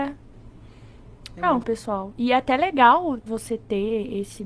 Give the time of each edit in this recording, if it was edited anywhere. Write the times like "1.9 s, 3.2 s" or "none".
1.6 s, 3.3 s